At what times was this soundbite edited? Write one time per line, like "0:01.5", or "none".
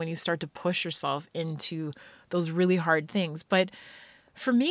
none